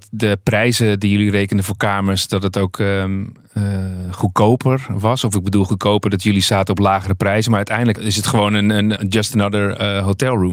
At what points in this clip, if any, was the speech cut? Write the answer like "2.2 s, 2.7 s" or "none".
9.0 s